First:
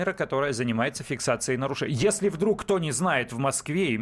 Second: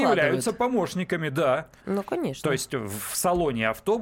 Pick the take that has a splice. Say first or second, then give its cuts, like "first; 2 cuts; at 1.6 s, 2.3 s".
second; 1 cut; at 1.8 s